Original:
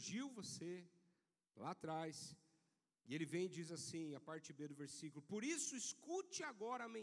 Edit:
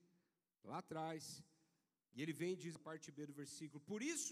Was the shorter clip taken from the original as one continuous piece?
no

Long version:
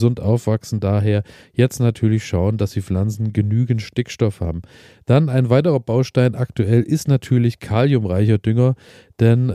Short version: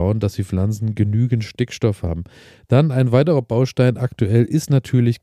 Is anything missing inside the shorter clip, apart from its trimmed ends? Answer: no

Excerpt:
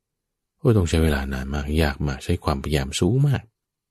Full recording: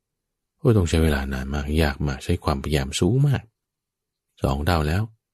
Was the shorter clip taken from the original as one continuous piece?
yes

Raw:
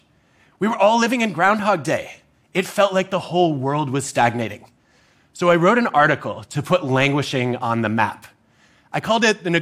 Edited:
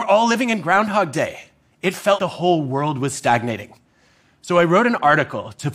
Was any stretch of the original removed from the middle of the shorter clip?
yes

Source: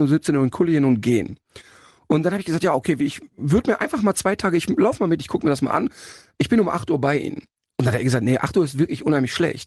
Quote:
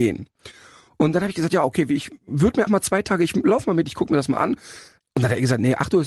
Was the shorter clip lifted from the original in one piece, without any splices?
no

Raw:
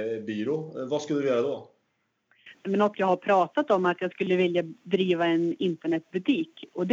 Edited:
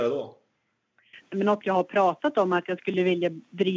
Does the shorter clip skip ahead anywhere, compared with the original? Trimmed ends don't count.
no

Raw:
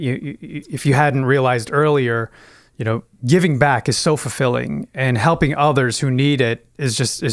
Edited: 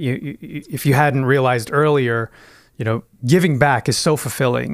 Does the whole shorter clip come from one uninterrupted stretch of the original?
yes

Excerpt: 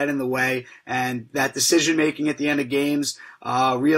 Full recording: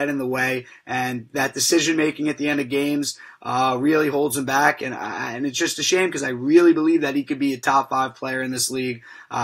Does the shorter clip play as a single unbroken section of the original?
yes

